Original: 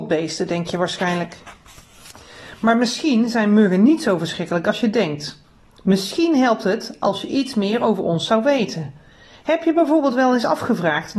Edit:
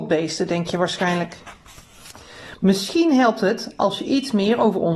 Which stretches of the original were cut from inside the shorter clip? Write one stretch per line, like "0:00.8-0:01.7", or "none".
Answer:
0:02.5-0:05.8

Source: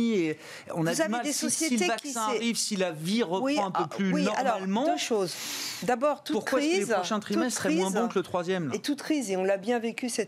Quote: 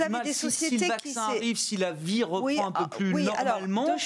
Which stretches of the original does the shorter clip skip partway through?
none

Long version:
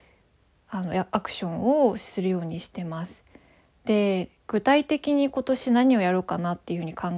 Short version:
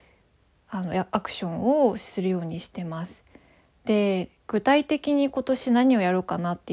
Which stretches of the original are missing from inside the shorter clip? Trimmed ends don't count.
none

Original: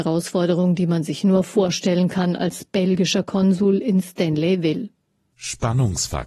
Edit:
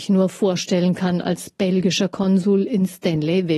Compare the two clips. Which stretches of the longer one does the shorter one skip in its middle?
none

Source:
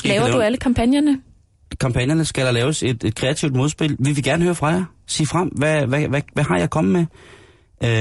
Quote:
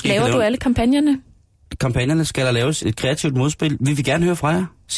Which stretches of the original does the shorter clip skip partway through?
0:02.8-0:03.0

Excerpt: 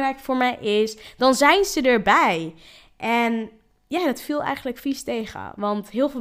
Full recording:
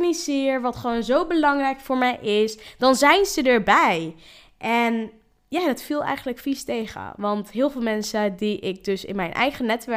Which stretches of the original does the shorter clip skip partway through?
none

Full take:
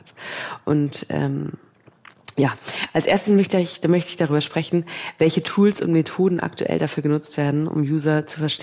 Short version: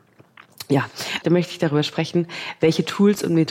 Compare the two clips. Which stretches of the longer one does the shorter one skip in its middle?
0:02.9-0:03.8

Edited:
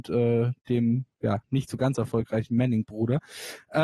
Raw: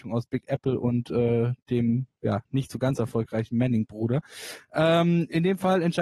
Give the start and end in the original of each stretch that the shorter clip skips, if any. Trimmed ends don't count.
none

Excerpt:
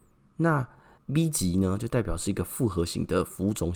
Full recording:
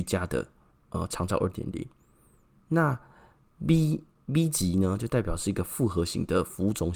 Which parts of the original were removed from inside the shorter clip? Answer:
0:03.3-0:04.2

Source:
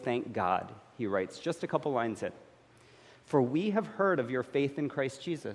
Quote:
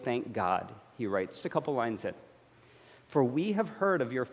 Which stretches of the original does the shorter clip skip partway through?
0:01.4-0:01.6

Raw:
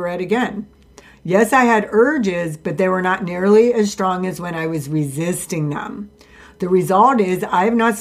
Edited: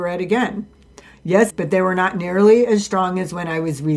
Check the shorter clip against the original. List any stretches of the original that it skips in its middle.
0:01.5-0:02.6

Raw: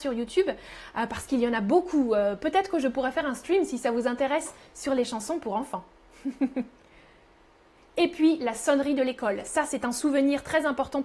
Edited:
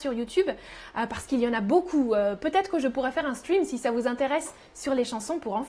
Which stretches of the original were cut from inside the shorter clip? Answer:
none

